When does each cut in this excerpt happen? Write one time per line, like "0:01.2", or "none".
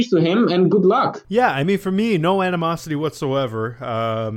none